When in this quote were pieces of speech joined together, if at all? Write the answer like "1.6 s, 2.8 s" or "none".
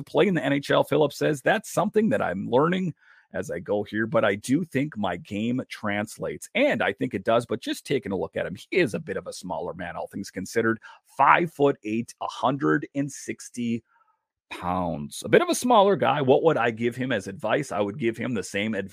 none